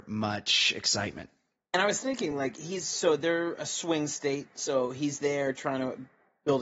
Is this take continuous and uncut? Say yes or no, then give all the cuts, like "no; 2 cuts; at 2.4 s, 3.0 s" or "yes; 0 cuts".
yes; 0 cuts